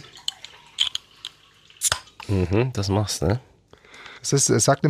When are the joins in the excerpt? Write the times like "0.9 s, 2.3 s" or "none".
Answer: 2.2 s